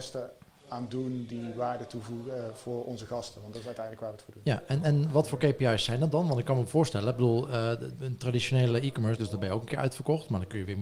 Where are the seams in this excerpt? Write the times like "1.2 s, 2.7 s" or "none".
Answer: 8.0 s, 9.2 s